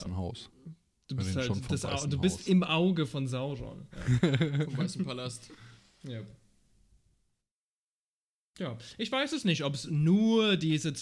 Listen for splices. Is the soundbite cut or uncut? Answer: uncut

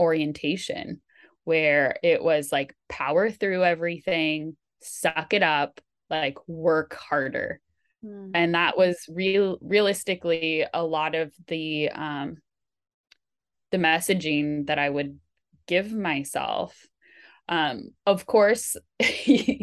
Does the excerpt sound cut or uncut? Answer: uncut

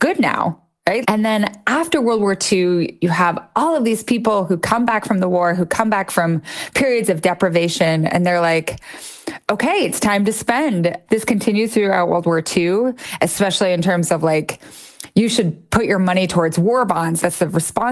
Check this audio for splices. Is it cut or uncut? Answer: cut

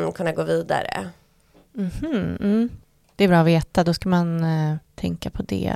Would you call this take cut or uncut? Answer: uncut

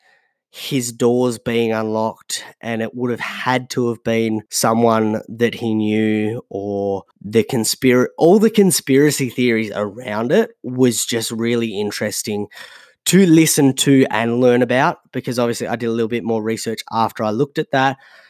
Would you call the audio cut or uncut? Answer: cut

